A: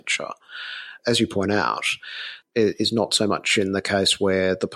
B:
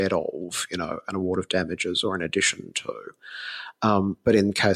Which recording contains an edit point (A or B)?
A